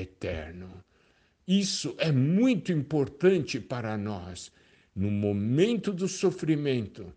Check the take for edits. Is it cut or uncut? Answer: uncut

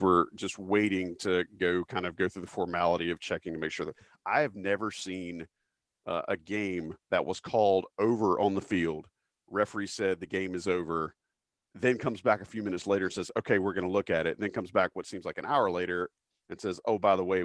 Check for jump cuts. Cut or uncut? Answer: uncut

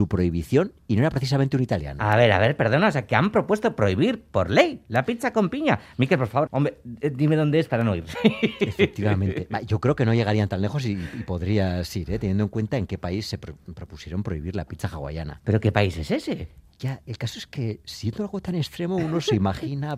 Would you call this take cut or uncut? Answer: cut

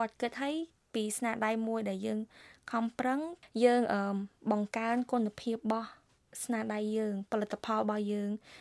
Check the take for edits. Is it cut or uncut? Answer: uncut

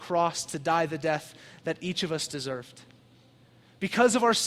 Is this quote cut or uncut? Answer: uncut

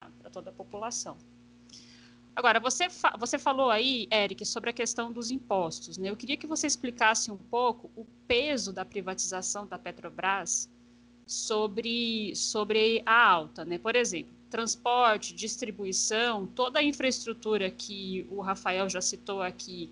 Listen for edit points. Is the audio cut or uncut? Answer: uncut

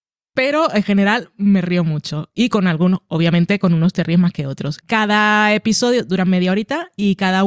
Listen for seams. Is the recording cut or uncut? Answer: cut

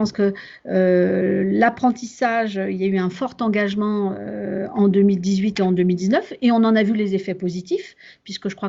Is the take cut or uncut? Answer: uncut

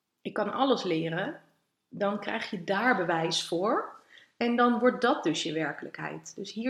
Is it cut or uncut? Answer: uncut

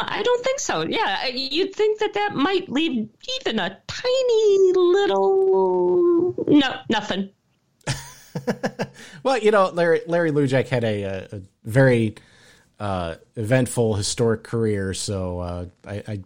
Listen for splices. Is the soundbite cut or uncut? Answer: uncut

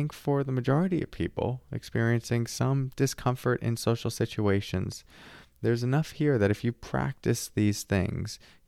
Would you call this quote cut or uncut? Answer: uncut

